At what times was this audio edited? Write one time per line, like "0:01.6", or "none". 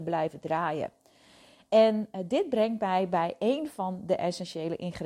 none